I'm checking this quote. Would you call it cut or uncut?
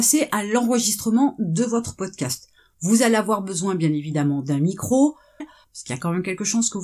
cut